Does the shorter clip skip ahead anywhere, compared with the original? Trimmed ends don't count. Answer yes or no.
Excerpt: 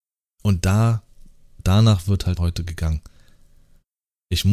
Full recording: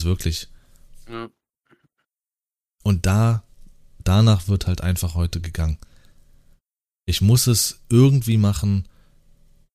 yes